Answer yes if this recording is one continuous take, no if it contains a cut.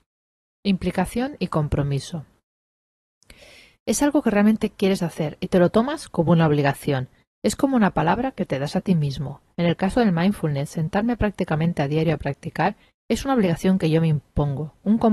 yes